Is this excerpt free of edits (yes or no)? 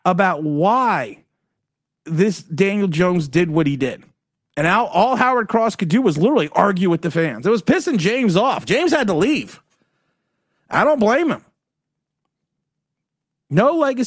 yes